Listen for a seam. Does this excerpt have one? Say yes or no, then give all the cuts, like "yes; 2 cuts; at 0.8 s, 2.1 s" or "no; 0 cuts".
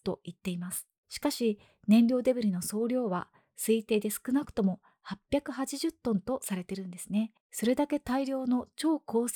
yes; 2 cuts; at 1.0 s, 7.4 s